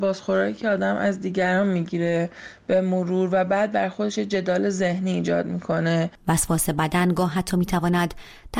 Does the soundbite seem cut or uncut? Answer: cut